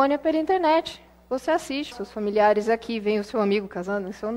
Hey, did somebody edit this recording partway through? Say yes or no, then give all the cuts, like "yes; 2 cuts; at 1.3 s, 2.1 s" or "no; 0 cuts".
yes; 1 cut; at 1.9 s